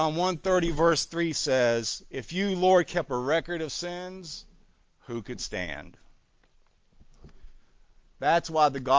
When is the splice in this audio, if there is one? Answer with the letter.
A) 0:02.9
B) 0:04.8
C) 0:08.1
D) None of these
B